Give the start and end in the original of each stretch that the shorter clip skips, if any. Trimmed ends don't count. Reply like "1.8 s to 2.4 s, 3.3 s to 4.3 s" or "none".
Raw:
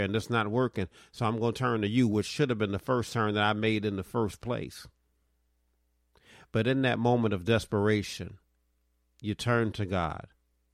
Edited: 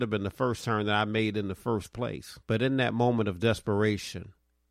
4.9 s to 6.5 s